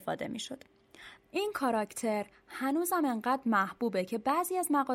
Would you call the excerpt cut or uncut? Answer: cut